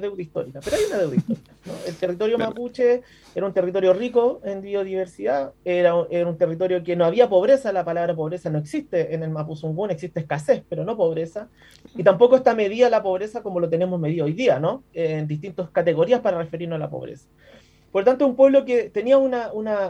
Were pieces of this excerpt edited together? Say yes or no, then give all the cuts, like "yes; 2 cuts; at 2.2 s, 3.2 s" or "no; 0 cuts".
no; 0 cuts